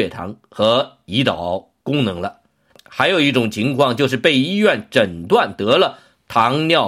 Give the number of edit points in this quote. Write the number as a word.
one